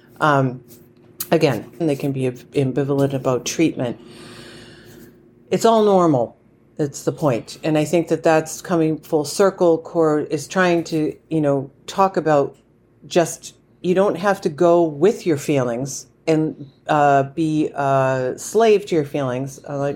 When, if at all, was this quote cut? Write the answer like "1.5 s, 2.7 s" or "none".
1.8 s